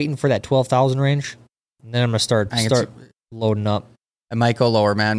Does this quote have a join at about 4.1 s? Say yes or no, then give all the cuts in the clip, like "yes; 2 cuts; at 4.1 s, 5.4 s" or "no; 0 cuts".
no; 1 cut; at 2.5 s